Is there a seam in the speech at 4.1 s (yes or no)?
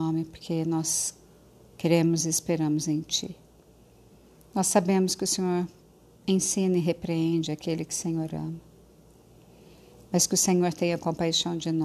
no